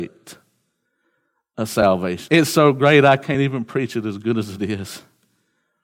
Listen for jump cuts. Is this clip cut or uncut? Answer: uncut